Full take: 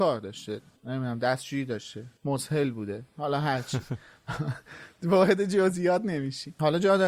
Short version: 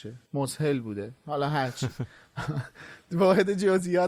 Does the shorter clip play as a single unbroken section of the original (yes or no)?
yes